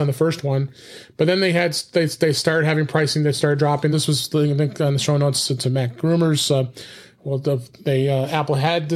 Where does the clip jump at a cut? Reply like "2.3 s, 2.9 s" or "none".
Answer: 3.9 s